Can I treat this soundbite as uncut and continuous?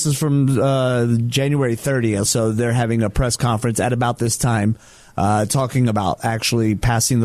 no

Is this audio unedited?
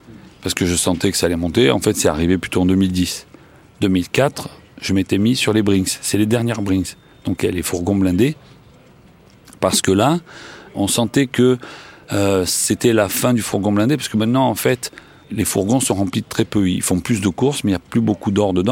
no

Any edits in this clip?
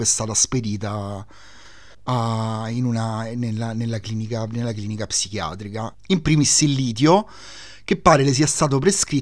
yes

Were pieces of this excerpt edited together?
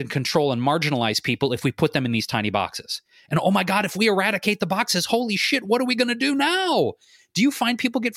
no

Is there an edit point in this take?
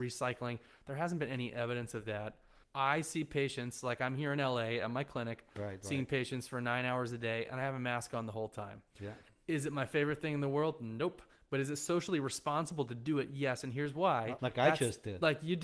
yes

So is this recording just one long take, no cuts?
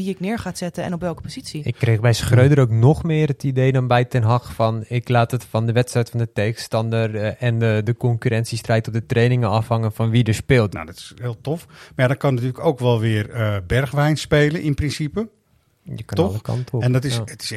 no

